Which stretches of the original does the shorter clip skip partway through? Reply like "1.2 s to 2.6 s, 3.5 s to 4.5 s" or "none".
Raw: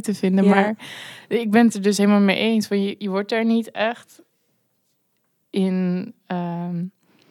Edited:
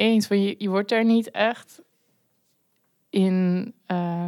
none